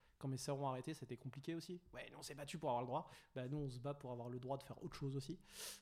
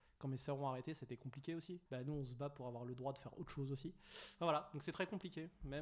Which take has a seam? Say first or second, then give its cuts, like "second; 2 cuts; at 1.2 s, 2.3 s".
second; 1 cut; at 1.9 s